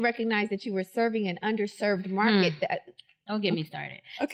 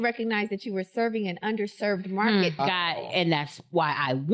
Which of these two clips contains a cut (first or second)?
second